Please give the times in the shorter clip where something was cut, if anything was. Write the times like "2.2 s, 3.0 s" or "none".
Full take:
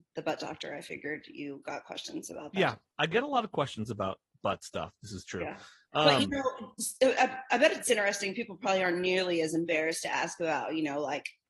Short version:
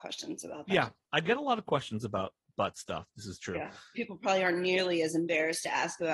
3.9 s